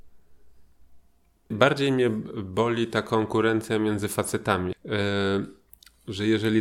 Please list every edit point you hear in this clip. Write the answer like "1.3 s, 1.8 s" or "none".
1.5 s, 4.7 s